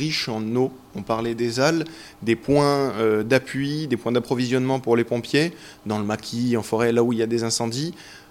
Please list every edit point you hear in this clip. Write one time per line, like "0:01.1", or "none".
none